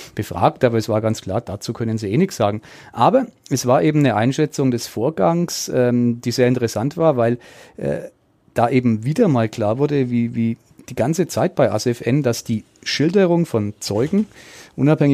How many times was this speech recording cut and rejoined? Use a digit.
0